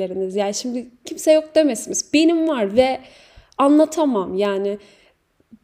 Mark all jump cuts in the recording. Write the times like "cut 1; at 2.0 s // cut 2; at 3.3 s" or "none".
none

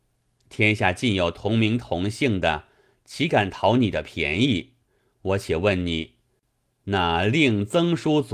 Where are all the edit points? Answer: none

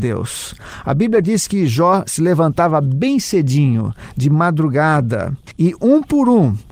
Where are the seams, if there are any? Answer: none

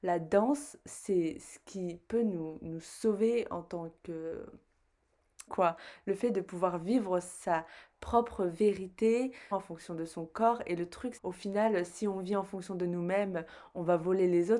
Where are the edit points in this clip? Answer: cut 1; at 5.5 s // cut 2; at 9.5 s // cut 3; at 11.2 s

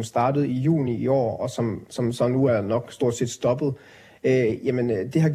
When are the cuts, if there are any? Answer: none

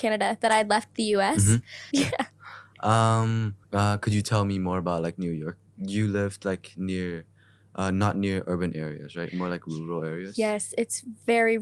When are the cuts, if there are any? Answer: cut 1; at 1.9 s // cut 2; at 3.6 s

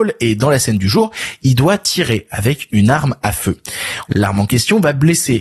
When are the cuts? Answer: cut 1; at 4.1 s

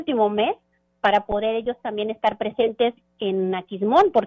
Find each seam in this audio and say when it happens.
none

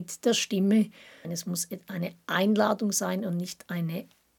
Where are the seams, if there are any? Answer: cut 1; at 1.2 s

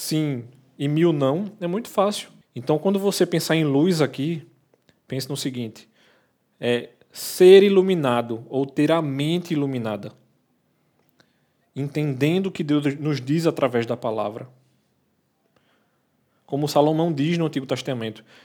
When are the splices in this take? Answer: cut 1; at 2.4 s

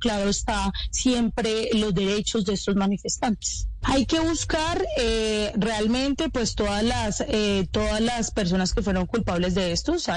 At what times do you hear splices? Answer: cut 1; at 3.8 s

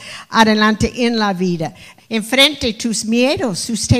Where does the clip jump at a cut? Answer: cut 1; at 2.0 s

